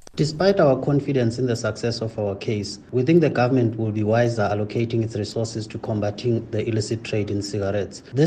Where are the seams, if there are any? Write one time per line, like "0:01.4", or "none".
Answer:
none